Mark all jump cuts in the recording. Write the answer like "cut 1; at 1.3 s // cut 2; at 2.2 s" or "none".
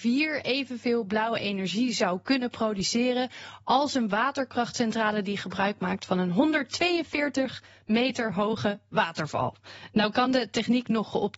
none